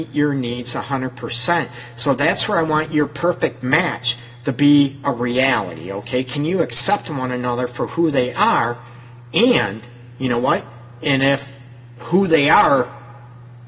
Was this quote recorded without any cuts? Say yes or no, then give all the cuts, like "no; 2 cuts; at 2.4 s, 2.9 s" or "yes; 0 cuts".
yes; 0 cuts